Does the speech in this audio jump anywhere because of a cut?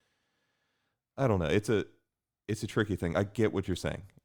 no; 0 cuts

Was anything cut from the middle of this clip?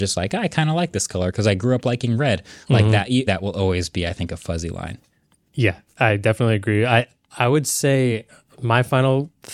yes; 2 cuts; at 3.3 s, 5.9 s

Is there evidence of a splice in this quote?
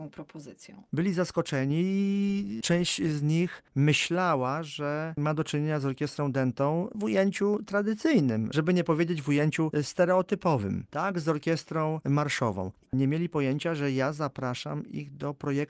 no; 0 cuts

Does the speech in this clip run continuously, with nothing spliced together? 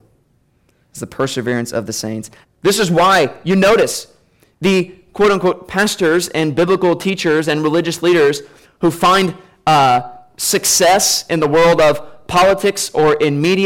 no; 1 cut; at 2.4 s

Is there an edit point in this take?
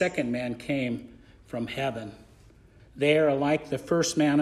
yes; 1 cut; at 2.8 s

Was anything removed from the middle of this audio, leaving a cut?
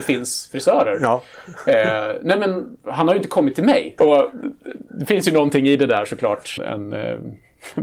yes; 2 cuts; at 4.0 s, 6.6 s

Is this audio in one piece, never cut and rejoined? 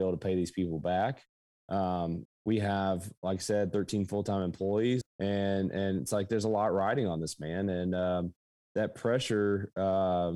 no; 2 cuts; at 2.3 s, 5.0 s

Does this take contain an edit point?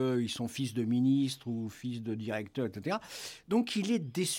no; 0 cuts

